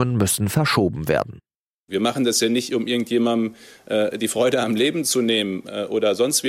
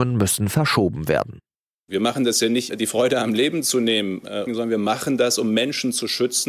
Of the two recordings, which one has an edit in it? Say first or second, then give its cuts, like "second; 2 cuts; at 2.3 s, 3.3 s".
second; 2 cuts; at 2.7 s, 4.5 s